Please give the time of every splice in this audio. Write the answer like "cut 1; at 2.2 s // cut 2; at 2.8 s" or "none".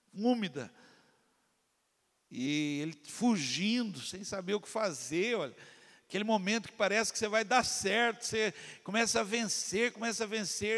none